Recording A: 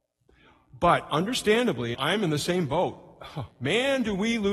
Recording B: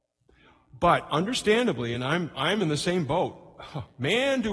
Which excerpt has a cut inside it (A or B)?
A